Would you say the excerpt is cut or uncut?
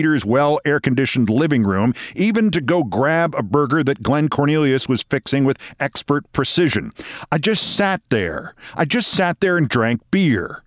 uncut